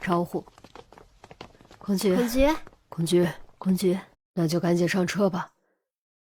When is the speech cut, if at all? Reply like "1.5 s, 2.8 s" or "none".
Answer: 4.1 s